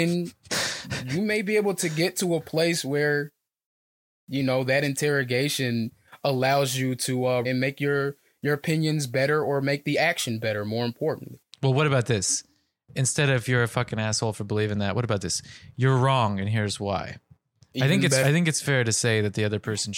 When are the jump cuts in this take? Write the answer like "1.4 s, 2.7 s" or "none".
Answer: 7.4 s, 18.2 s